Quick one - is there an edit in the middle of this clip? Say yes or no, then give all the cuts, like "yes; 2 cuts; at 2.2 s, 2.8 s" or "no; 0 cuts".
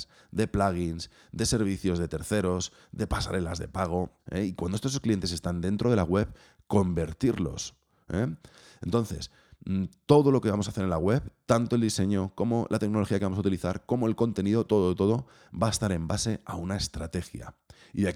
yes; 2 cuts; at 4.2 s, 14.7 s